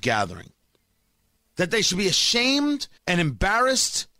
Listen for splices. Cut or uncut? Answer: cut